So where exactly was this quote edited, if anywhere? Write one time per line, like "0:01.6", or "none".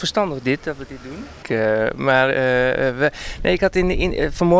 0:01.4